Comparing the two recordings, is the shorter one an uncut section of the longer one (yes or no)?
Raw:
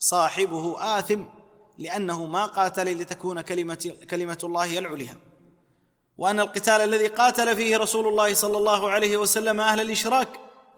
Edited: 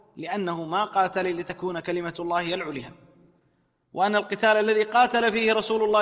no